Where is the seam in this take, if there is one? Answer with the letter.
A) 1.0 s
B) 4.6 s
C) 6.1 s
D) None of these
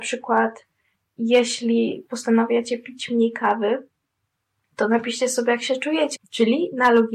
C